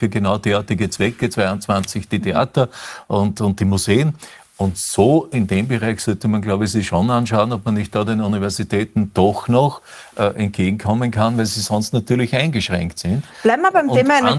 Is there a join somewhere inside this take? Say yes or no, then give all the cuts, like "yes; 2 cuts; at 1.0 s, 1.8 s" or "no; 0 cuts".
no; 0 cuts